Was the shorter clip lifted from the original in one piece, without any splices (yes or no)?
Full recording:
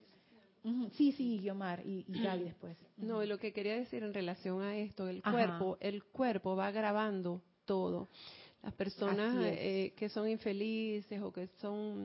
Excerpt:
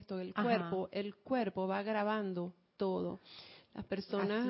yes